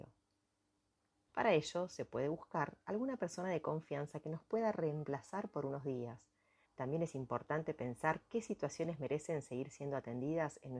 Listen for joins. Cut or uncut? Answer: cut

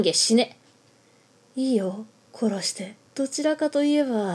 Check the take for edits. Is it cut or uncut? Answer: cut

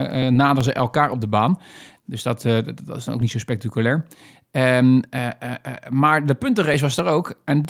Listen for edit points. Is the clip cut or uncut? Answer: cut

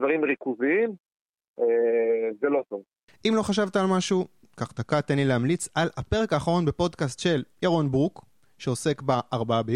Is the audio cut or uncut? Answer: cut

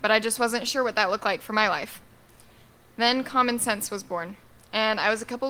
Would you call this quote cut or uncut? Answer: uncut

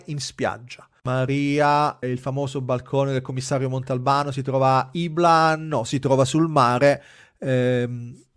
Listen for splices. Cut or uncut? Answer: cut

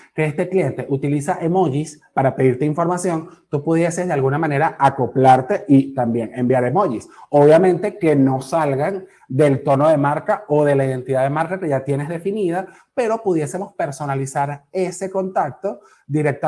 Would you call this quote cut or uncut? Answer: uncut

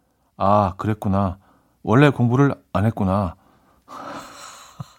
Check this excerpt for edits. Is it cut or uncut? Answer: uncut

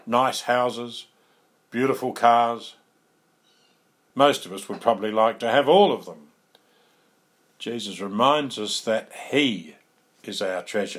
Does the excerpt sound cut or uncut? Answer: cut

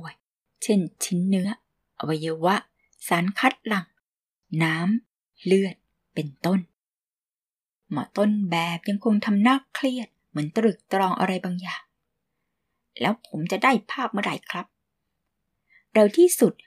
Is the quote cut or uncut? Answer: uncut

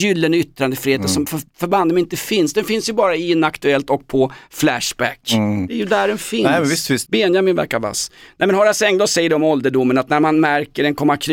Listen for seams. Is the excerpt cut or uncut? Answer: cut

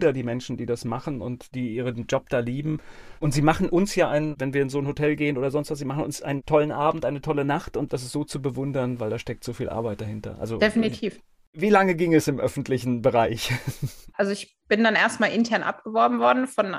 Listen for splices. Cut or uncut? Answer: uncut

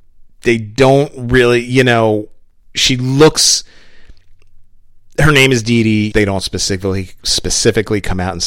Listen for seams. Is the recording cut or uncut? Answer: cut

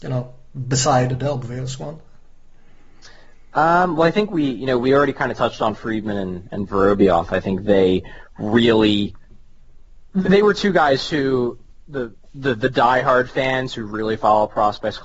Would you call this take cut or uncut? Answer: uncut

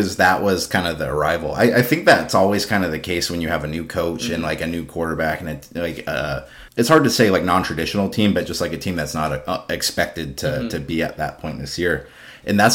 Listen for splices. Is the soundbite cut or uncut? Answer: cut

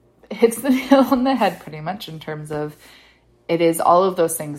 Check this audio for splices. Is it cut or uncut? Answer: uncut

